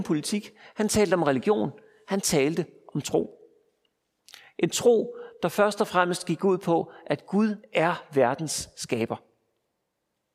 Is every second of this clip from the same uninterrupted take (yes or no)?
yes